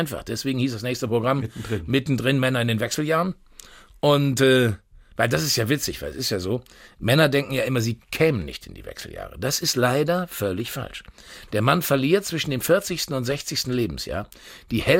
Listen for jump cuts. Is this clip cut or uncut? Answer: uncut